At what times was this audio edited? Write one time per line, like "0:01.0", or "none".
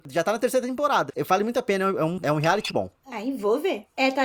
0:01.1
0:02.7

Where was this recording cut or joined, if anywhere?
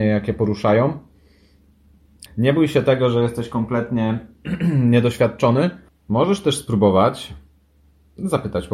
0:02.3
0:05.9

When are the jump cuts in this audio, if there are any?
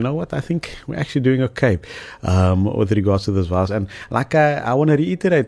0:03.7

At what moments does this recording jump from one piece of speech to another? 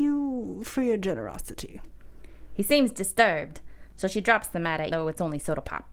0:03.9
0:04.9

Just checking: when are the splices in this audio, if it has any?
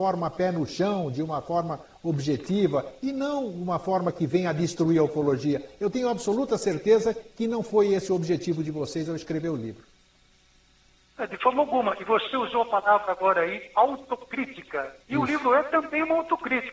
0:15.0

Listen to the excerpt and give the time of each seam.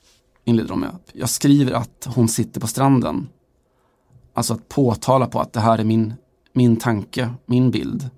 0:01.0

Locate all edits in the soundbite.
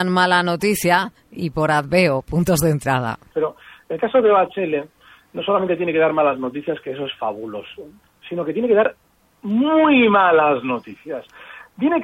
0:03.3

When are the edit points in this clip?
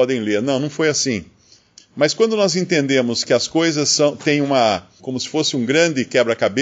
0:01.8
0:05.0

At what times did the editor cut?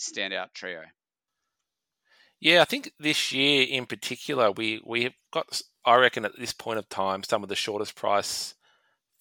none

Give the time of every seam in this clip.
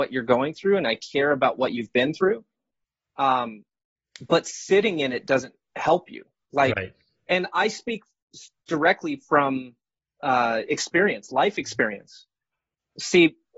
none

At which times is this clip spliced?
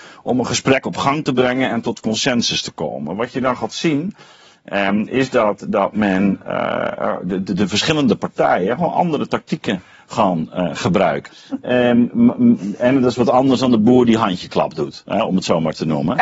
0:11.3

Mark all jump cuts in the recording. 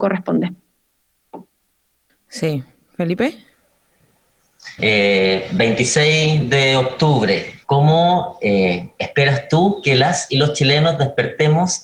0:04.8
0:07.6

